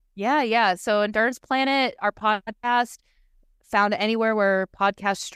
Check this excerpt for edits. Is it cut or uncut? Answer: uncut